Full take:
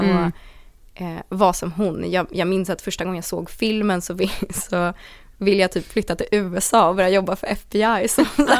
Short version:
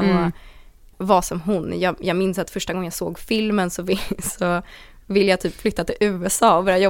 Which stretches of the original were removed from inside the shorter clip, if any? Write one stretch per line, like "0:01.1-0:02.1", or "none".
0:00.9-0:01.2